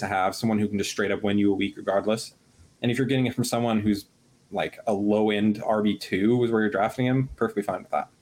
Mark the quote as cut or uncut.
uncut